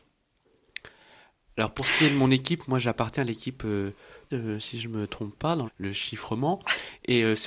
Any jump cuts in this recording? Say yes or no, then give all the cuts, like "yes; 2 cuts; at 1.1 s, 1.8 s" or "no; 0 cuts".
yes; 2 cuts; at 4.3 s, 5.6 s